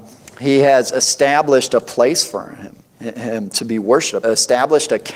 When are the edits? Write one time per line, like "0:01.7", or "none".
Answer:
0:02.9
0:04.2